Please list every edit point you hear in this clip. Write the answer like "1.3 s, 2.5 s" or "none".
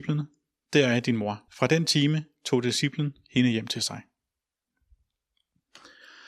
1.5 s